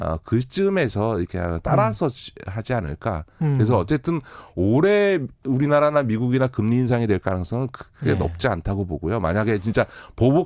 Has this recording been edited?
no; 0 cuts

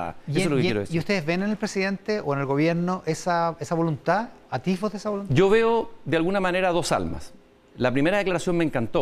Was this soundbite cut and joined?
no; 0 cuts

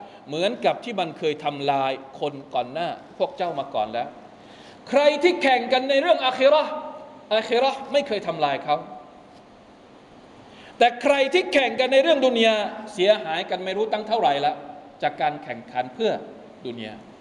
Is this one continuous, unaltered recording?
yes; 0 cuts

